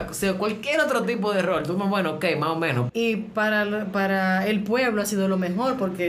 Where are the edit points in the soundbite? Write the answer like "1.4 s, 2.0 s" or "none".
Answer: 2.9 s